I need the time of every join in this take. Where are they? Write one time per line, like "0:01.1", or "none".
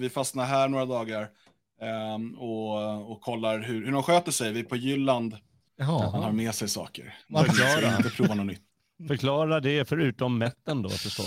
0:05.7